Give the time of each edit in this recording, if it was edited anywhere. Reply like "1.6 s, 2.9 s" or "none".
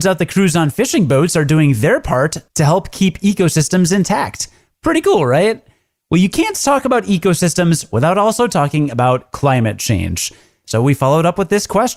none

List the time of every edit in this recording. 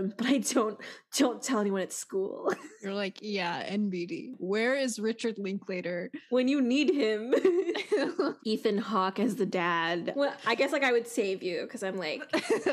8.4 s, 10.1 s

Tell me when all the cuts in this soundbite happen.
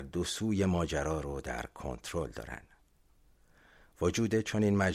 none

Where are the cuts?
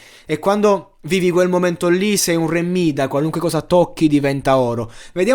none

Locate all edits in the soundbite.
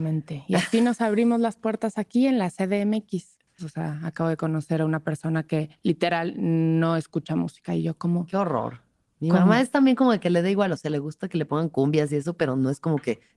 3.6 s

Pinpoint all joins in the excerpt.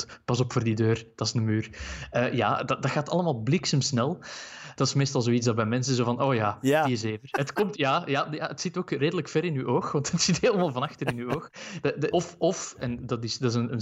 4.7 s, 7.3 s, 12.1 s

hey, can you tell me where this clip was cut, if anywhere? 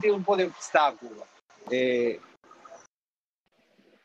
1.6 s

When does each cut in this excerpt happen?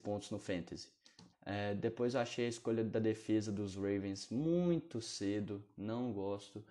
1.3 s

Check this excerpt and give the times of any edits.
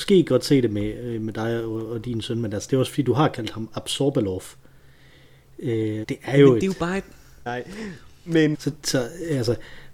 6.0 s, 7.5 s, 8.5 s

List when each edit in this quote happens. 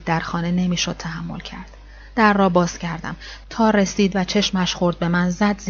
3.4 s

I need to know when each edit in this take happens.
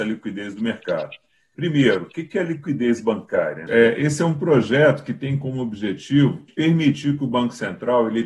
1.5 s, 3.7 s, 6.5 s

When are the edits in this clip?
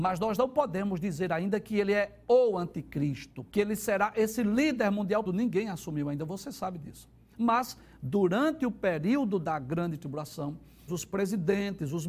3.5 s, 5.3 s, 10.9 s

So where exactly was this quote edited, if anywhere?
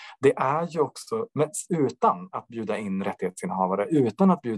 none

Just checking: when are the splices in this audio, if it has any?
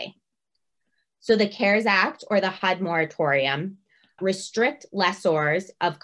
4.2 s

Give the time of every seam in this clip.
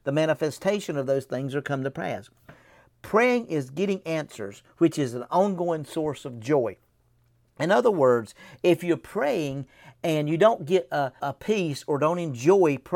11.2 s

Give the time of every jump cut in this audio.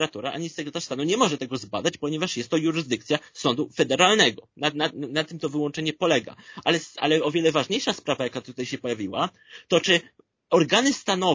4.5 s

